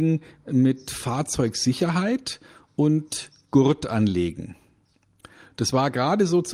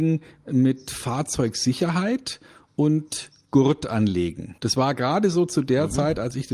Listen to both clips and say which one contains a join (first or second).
second